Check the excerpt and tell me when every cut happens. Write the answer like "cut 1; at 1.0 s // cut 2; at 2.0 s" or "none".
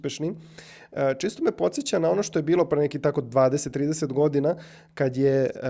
none